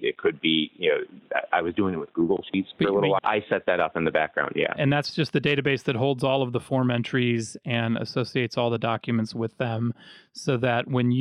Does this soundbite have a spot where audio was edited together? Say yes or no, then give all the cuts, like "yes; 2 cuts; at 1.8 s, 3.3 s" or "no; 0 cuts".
yes; 1 cut; at 3.2 s